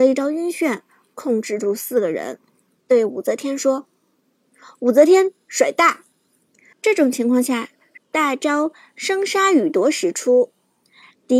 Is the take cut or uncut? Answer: cut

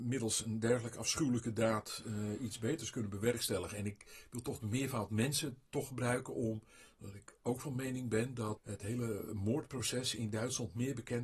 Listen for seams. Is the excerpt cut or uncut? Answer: cut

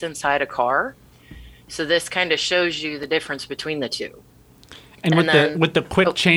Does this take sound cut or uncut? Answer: uncut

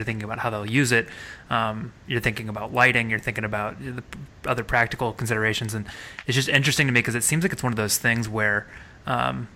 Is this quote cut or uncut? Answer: uncut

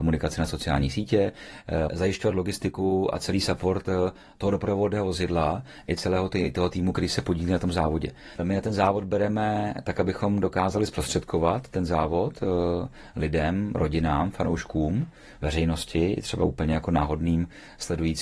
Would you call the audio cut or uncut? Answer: cut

